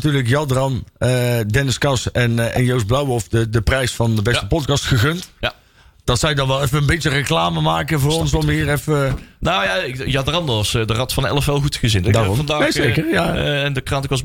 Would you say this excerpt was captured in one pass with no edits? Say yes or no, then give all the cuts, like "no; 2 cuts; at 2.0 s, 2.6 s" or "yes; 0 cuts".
yes; 0 cuts